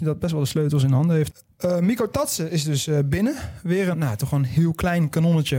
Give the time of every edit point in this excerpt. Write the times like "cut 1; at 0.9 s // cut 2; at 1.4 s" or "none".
cut 1; at 3.9 s